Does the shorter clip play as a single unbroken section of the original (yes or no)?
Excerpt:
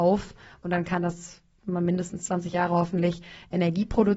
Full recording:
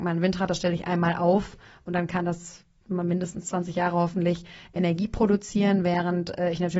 yes